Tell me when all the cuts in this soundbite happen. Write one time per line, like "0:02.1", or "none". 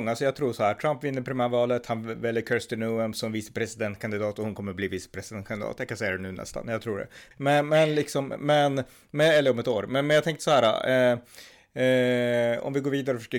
0:07.3